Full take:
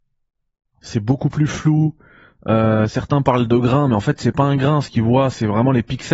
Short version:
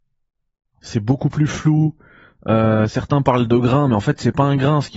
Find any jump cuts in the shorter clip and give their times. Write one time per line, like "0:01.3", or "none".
none